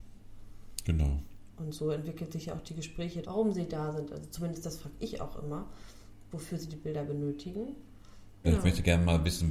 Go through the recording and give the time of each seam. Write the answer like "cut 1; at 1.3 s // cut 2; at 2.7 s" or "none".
cut 1; at 1.5 s // cut 2; at 3.2 s // cut 3; at 8.4 s